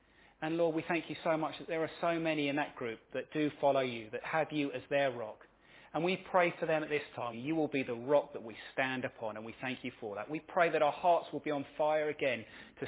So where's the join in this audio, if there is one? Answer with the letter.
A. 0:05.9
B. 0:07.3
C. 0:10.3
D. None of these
B